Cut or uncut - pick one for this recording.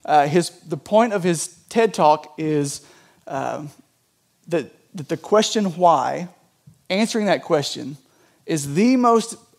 uncut